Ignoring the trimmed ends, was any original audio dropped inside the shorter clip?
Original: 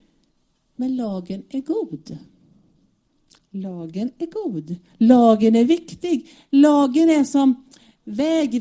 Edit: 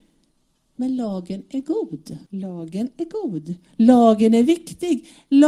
yes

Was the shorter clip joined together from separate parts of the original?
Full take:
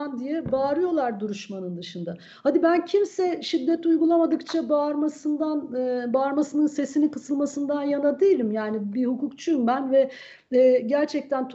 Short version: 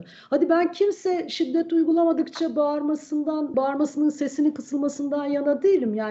yes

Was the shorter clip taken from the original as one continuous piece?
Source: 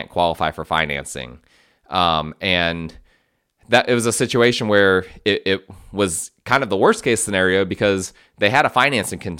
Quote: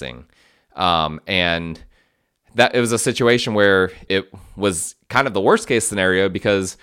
no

